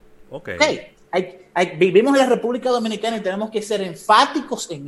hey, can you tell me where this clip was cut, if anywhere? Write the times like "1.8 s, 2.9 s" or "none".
1.0 s